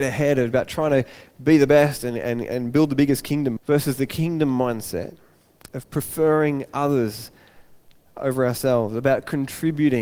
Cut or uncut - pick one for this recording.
cut